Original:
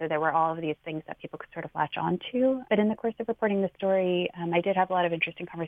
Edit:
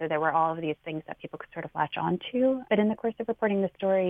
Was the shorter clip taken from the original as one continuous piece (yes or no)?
yes